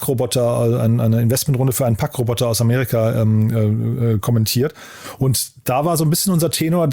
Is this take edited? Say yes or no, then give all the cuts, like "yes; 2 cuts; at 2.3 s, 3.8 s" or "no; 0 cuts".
no; 0 cuts